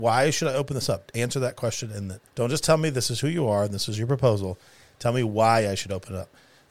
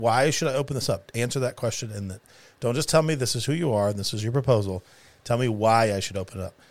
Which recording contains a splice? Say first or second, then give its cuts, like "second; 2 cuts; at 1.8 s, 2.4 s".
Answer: first; 1 cut; at 2.3 s